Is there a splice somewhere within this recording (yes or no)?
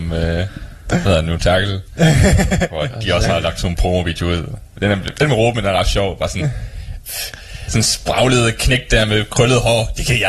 yes